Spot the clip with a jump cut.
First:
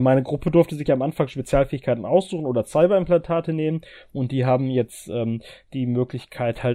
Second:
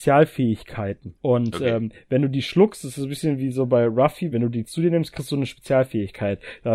second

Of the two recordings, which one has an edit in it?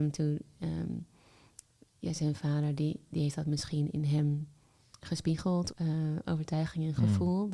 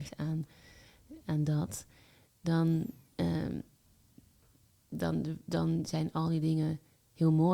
first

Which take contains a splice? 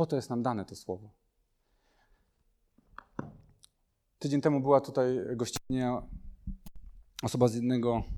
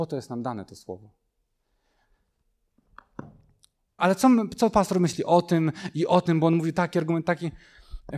second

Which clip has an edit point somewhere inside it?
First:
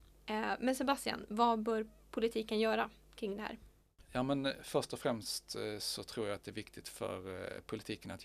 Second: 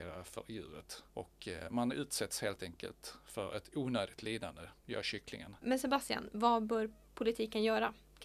second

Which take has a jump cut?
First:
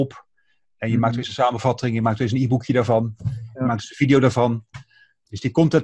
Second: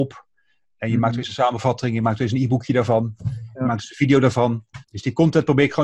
second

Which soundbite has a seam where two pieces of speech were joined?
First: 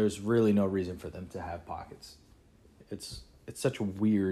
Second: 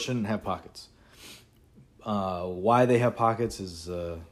first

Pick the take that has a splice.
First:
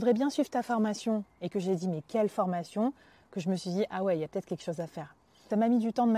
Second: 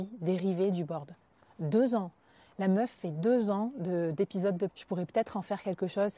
second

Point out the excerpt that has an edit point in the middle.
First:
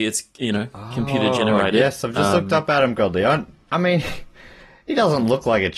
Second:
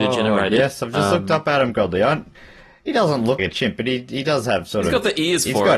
second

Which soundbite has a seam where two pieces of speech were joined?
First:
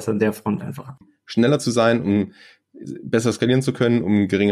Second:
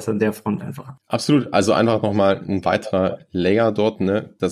first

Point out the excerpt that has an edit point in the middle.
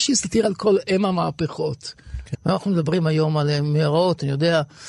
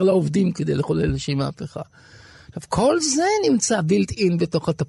first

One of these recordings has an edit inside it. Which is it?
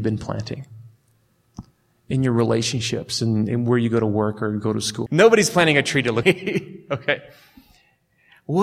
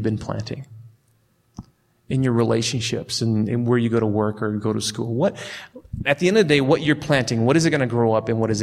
first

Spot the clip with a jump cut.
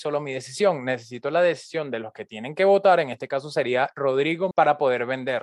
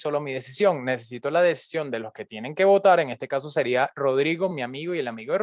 first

